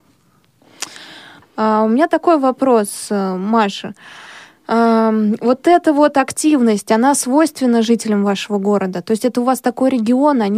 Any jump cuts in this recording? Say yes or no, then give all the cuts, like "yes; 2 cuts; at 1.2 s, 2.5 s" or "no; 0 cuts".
yes; 1 cut; at 1.4 s